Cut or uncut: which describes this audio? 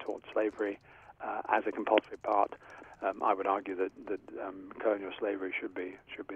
cut